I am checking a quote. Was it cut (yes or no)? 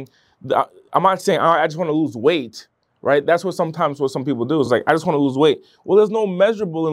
no